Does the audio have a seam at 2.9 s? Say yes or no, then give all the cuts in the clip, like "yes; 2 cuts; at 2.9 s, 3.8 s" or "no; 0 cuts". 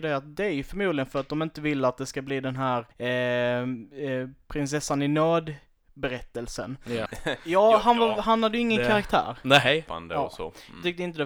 yes; 3 cuts; at 2.9 s, 7.1 s, 9.9 s